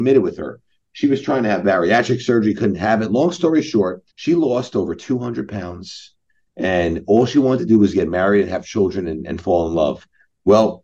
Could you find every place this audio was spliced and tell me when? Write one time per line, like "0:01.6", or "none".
0:04.1